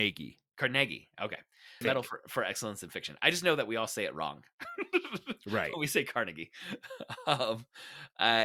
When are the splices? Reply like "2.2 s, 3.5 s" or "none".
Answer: 1.8 s